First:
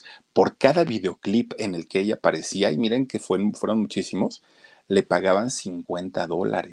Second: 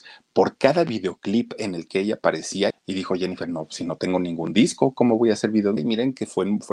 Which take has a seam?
second; 2 cuts; at 2.7 s, 5.8 s

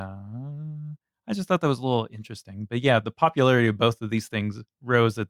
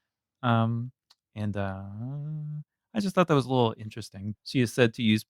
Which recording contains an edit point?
second; 1 cut; at 4.3 s

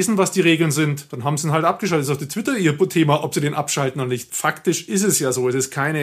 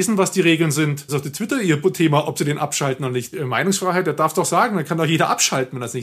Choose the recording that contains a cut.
second; 2 cuts; at 1.1 s, 3.3 s

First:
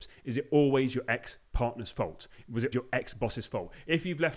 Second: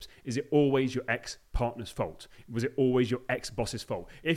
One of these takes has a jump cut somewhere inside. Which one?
first; 1 cut; at 2.7 s

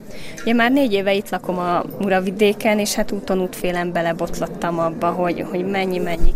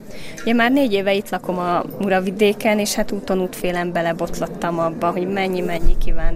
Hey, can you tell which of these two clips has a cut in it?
second; 1 cut; at 5.1 s

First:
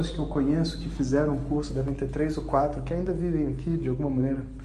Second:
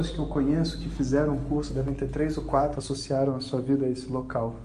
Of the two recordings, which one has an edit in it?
second; 1 cut; at 2.7 s

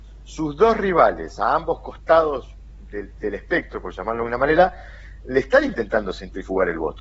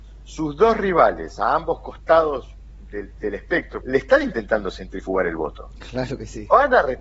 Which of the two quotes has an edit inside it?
second; 1 cut; at 3.8 s

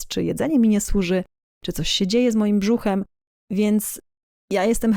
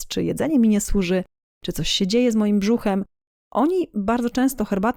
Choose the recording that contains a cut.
first; 1 cut; at 3.4 s

